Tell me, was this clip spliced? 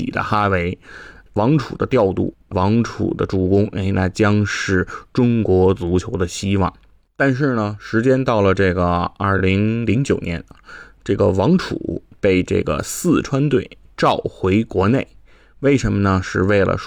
no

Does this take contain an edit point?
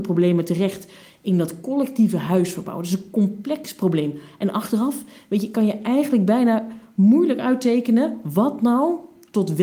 no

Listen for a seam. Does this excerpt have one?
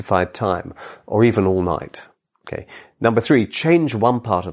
yes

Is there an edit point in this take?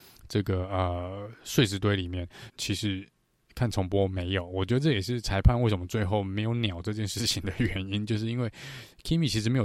yes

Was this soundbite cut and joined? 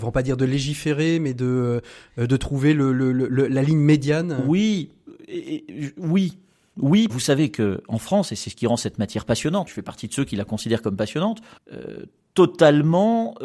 yes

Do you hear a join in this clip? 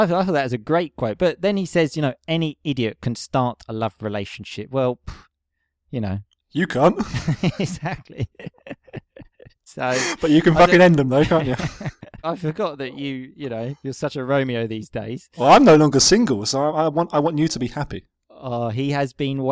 yes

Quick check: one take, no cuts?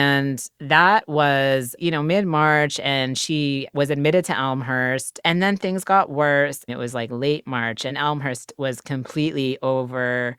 no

